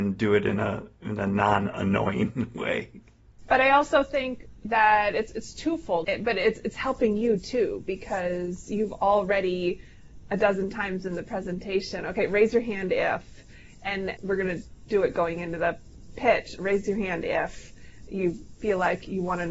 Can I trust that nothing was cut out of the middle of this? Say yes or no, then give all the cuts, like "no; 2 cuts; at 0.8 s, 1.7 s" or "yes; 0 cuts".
no; 2 cuts; at 6.0 s, 14.2 s